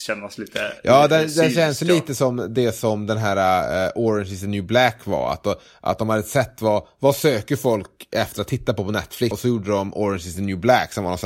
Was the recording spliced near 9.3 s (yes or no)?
yes